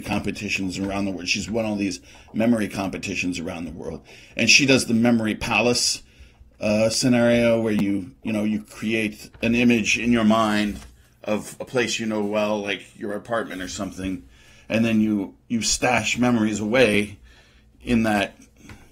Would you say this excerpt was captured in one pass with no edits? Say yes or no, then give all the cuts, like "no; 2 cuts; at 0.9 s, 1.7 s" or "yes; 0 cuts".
yes; 0 cuts